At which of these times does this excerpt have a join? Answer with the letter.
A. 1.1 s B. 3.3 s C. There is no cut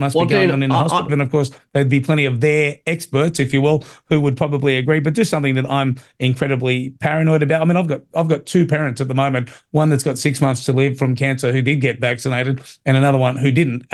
A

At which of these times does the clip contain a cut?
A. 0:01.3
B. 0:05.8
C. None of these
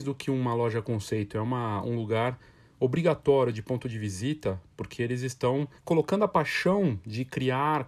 B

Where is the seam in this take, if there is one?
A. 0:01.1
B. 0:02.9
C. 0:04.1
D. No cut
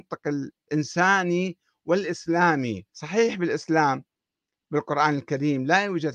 B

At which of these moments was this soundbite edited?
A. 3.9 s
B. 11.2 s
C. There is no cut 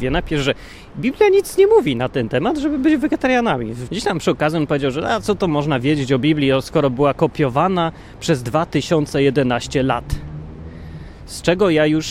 A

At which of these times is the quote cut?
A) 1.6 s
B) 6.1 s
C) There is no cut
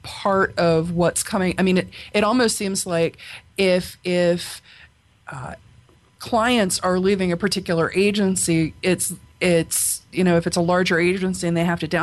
C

